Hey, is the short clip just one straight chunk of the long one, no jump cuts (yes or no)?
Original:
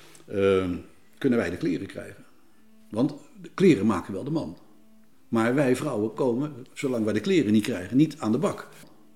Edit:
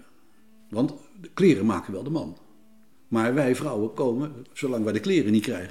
yes